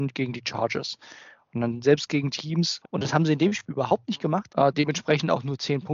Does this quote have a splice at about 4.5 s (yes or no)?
yes